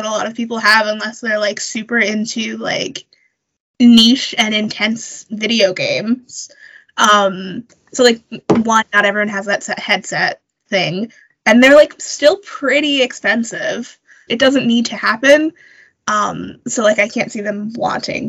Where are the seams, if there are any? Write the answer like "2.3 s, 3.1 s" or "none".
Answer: 14.3 s